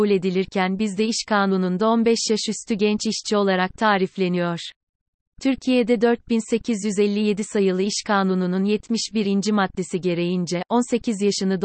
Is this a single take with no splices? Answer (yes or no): yes